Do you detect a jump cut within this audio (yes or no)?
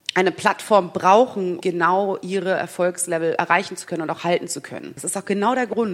yes